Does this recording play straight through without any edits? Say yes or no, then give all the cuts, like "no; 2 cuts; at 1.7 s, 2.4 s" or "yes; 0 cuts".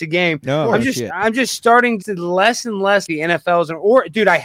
no; 2 cuts; at 2.0 s, 3.1 s